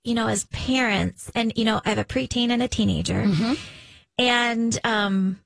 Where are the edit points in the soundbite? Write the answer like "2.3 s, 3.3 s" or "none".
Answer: 1.8 s